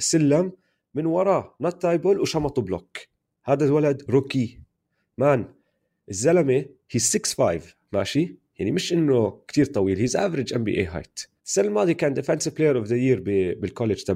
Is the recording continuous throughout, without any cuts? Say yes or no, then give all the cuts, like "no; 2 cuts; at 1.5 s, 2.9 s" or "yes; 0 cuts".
no; 2 cuts; at 4.0 s, 11.4 s